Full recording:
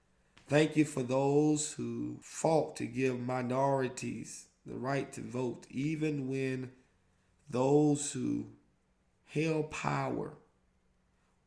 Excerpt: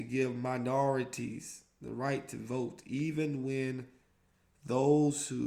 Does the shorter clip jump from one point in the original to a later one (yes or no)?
no